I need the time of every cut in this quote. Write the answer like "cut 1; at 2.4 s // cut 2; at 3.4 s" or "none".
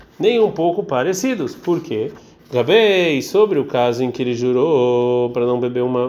none

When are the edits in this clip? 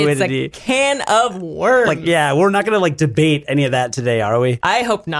none

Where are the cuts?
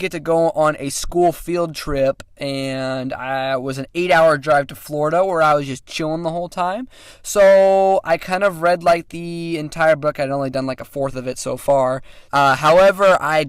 cut 1; at 12.3 s

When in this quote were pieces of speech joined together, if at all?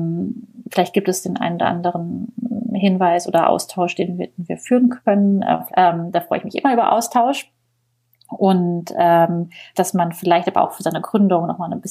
cut 1; at 5.7 s // cut 2; at 9.7 s

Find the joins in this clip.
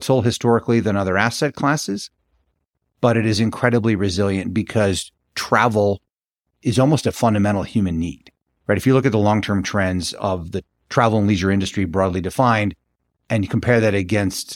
none

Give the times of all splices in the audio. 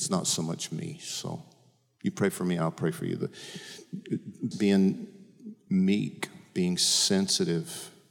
cut 1; at 4.5 s

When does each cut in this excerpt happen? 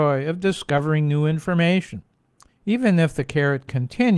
cut 1; at 2.5 s

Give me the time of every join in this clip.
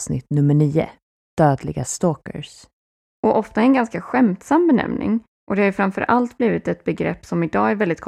cut 1; at 3.1 s

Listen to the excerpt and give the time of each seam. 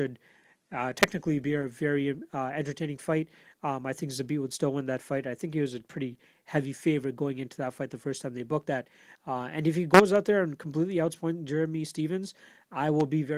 cut 1; at 9.2 s

